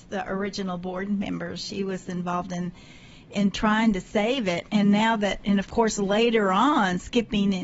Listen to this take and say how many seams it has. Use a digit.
0